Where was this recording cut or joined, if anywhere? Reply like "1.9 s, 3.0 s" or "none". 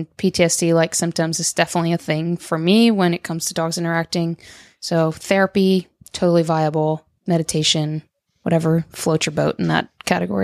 8.3 s